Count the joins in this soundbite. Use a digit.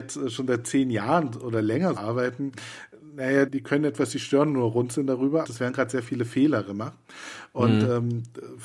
3